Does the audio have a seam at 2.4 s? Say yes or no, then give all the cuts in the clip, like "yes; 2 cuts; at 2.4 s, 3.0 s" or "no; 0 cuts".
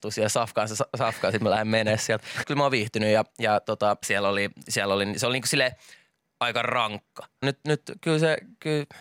yes; 3 cuts; at 2.4 s, 4.0 s, 7.4 s